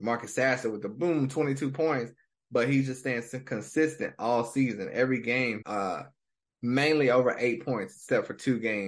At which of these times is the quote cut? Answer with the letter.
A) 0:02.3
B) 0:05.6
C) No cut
B